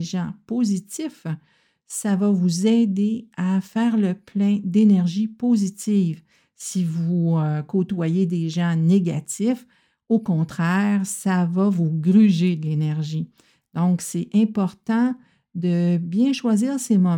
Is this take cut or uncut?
uncut